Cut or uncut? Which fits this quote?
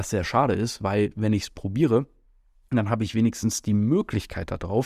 uncut